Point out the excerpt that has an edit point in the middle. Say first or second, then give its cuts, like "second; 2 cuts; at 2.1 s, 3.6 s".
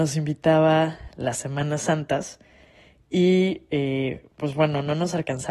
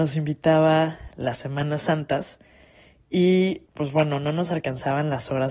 second; 1 cut; at 3.7 s